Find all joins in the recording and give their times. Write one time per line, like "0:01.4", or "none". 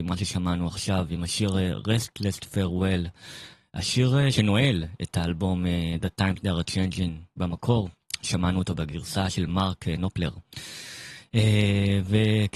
none